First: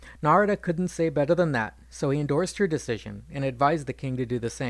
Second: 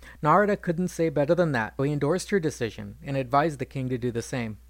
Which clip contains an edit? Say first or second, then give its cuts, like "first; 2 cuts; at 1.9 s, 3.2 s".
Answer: second; 1 cut; at 1.8 s